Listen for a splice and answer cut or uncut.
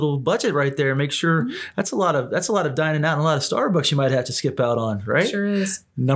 uncut